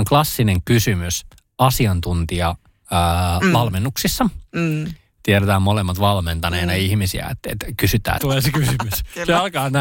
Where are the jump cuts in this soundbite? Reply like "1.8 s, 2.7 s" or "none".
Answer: 8.2 s